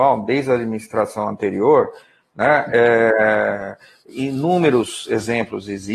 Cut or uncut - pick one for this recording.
uncut